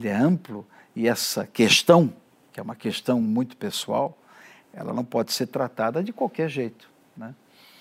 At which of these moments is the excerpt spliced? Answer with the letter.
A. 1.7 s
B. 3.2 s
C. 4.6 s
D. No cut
D